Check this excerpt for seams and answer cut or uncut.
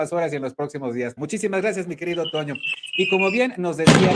cut